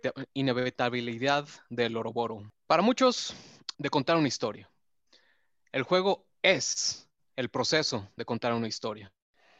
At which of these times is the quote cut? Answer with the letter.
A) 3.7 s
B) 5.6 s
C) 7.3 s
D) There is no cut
A